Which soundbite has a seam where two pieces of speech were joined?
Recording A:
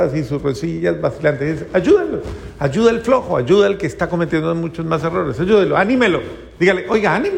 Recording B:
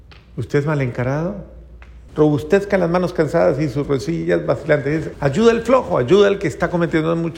B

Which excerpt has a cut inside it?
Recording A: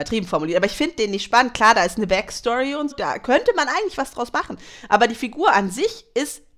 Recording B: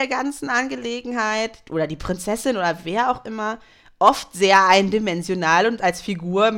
A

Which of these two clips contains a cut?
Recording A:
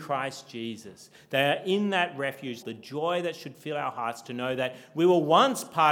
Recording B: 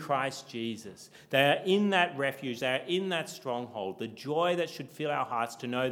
A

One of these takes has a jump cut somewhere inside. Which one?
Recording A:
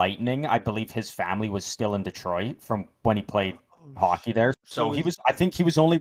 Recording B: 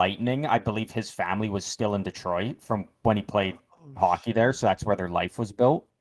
A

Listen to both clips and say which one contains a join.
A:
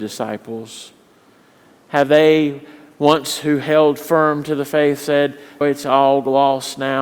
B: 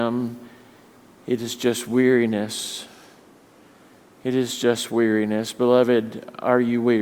A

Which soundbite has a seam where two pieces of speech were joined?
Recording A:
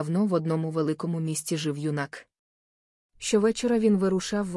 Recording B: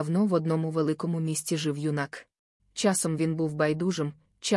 B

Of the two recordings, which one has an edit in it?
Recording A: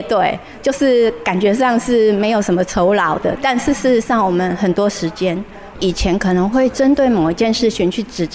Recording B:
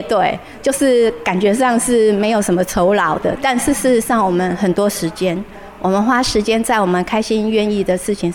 A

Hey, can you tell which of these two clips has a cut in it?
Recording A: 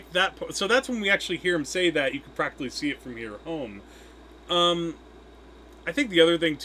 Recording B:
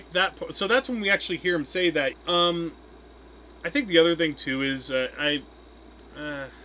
B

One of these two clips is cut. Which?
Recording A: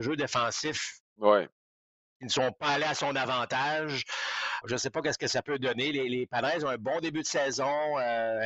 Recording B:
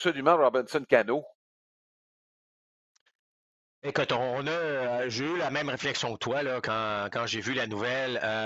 A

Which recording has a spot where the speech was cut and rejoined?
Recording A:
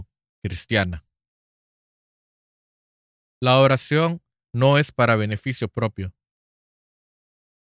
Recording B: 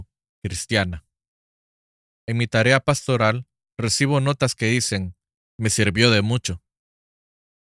B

